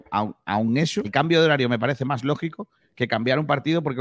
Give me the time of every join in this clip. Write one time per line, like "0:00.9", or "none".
0:01.0